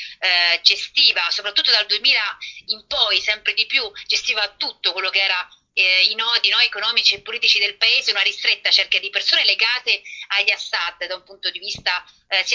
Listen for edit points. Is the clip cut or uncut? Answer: uncut